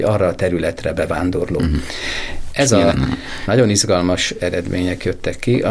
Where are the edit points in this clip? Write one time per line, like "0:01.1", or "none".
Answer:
0:02.9